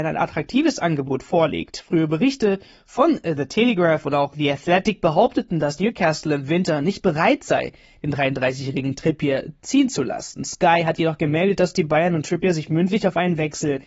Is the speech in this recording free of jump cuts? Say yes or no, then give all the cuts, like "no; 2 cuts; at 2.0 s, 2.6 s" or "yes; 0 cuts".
yes; 0 cuts